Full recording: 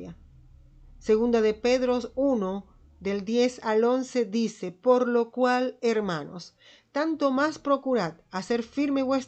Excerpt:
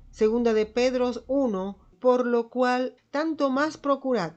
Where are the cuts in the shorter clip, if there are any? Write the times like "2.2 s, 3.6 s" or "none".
1.9 s, 3.0 s

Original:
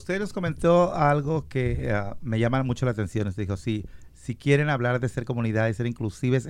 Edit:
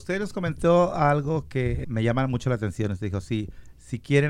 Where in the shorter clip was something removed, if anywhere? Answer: 1.8 s

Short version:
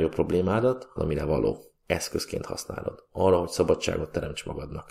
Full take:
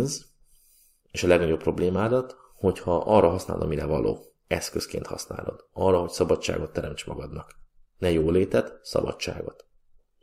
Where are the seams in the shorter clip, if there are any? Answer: 1.0 s

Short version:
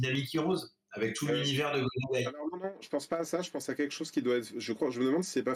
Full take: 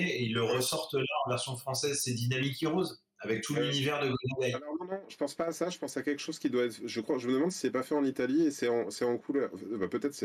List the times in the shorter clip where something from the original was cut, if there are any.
none

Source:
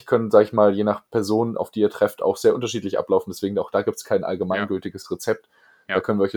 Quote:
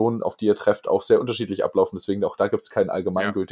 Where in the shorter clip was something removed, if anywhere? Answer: none

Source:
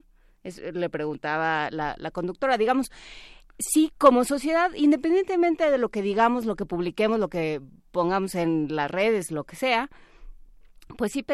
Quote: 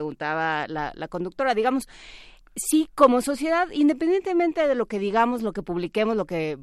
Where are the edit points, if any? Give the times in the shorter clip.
none

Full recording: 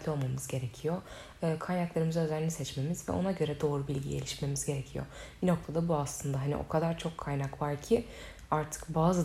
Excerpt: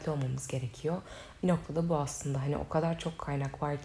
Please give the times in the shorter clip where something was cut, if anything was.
1.4 s

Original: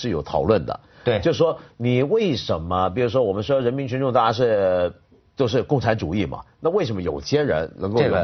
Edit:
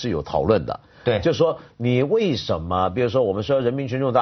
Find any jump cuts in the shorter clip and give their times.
none

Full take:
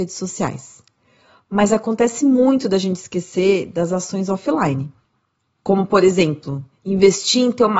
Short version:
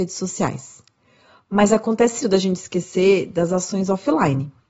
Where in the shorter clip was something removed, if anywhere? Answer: 2.2 s

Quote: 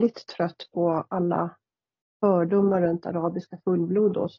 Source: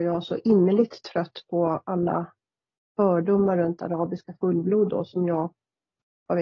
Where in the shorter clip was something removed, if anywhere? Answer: none

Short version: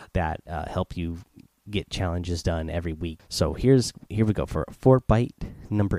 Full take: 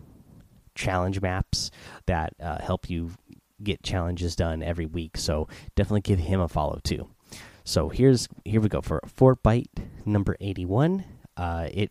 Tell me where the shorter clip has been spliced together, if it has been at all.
3.2 s

